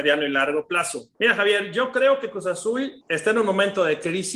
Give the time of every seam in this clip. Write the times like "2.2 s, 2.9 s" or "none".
1.1 s, 3.0 s